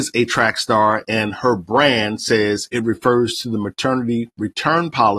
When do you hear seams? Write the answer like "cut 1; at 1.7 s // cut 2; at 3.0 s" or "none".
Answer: cut 1; at 2.7 s